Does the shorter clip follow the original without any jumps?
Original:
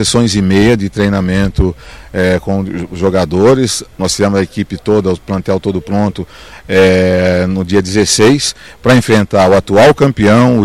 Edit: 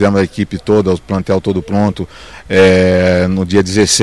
yes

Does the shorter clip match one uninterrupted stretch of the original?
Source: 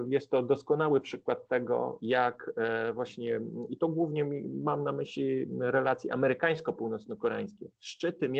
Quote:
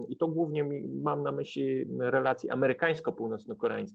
yes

